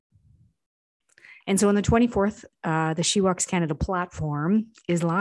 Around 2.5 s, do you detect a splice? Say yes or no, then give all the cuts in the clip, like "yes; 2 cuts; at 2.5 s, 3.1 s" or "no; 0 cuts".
yes; 2 cuts; at 1.4 s, 2.5 s